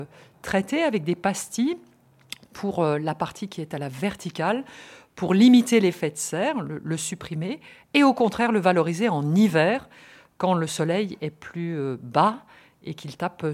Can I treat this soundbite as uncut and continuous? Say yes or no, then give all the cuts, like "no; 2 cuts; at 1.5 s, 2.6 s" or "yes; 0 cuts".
yes; 0 cuts